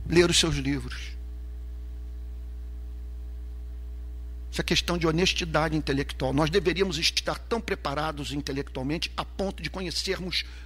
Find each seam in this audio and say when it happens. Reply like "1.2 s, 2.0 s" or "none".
none